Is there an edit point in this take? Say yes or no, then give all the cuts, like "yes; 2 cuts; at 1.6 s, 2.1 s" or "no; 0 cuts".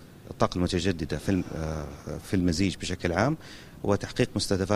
no; 0 cuts